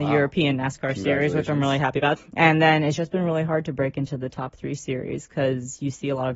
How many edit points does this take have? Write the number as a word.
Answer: one